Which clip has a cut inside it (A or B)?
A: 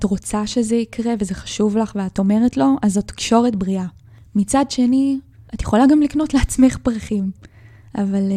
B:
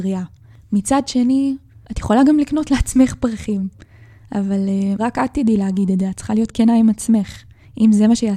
B